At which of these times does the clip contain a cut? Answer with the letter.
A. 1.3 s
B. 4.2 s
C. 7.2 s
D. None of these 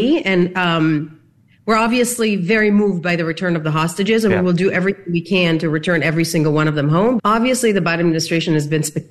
C